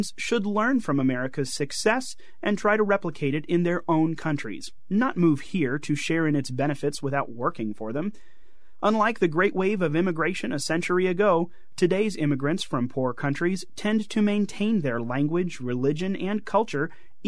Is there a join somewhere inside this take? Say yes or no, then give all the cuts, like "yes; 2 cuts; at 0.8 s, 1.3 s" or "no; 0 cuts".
no; 0 cuts